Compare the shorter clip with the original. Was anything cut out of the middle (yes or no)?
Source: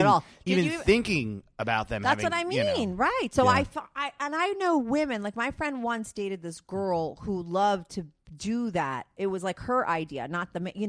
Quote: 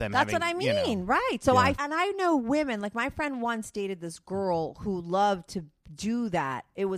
yes